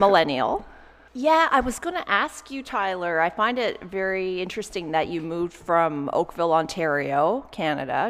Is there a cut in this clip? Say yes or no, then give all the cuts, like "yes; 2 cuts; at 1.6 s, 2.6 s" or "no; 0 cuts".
yes; 1 cut; at 1.1 s